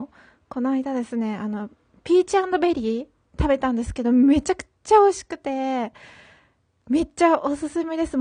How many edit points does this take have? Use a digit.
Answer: 0